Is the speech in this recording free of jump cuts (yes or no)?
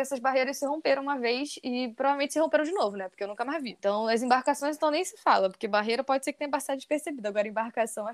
yes